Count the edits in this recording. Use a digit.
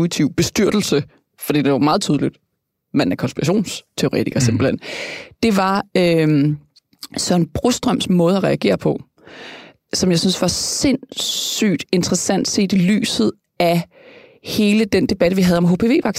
0